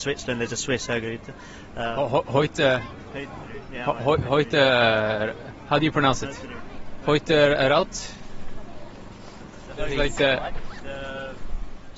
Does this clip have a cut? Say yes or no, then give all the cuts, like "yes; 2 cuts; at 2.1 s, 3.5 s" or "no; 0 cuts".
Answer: no; 0 cuts